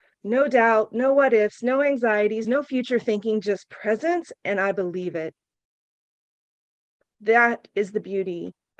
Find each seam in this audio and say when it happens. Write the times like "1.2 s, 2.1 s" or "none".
none